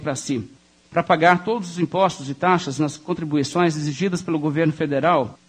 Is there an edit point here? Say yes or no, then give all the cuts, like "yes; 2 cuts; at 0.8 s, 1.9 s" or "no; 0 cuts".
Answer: no; 0 cuts